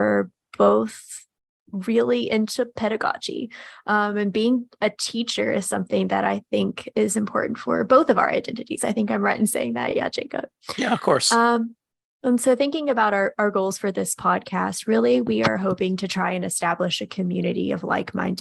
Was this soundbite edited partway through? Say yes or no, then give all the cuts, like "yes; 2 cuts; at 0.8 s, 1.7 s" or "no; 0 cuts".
no; 0 cuts